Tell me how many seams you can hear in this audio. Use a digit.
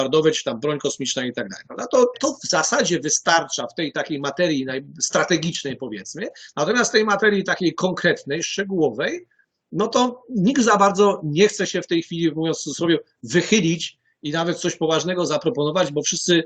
1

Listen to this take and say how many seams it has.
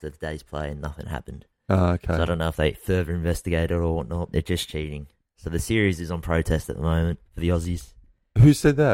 2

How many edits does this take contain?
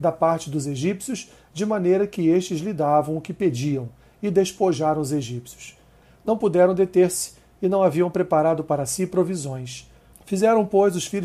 2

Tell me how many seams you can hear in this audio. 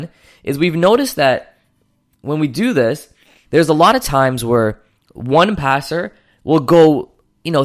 1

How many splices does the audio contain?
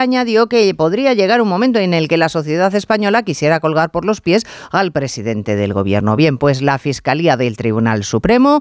0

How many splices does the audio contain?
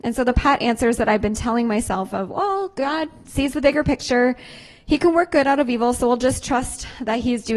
0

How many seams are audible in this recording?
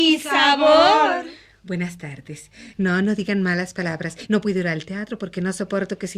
2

